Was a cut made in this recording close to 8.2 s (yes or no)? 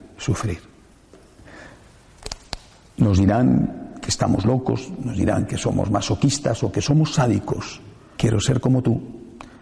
yes